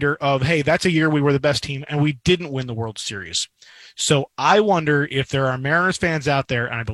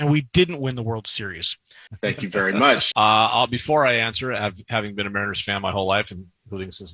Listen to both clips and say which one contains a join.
second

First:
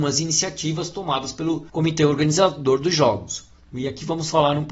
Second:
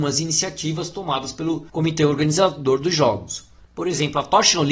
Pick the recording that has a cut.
second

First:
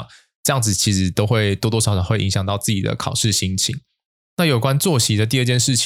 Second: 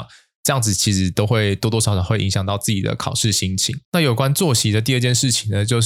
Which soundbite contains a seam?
second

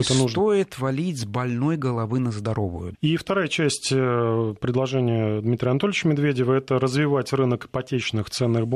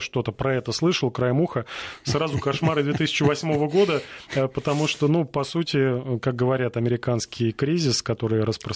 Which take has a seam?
first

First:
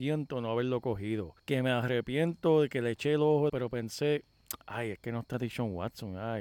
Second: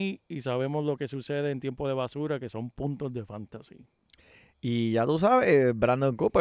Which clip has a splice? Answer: first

